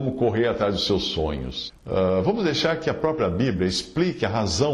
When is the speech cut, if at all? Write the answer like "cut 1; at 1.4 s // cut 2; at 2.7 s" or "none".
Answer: cut 1; at 1.7 s